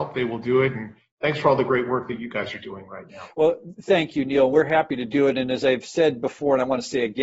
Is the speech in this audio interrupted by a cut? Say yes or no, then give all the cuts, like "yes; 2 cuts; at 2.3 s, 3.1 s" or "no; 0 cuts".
no; 0 cuts